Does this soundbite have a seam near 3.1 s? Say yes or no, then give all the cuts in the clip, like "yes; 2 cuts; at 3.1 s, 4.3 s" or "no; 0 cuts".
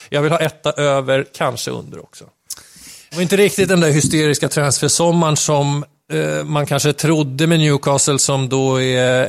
yes; 1 cut; at 3.1 s